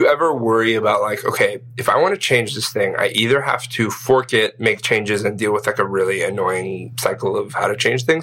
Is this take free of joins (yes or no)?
yes